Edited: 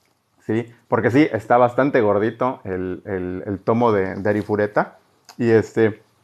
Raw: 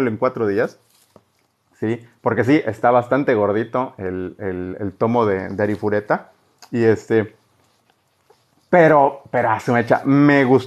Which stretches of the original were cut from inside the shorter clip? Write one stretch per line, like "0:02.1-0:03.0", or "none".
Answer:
none